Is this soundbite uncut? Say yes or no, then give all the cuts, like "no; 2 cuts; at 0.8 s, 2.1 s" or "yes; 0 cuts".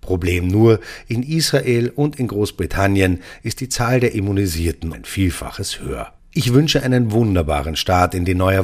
no; 2 cuts; at 4.9 s, 6.2 s